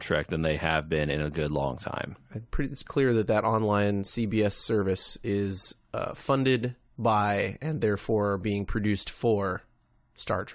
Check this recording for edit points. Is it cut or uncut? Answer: cut